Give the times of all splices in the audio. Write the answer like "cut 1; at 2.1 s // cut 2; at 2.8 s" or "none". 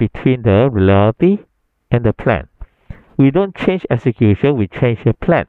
cut 1; at 3.1 s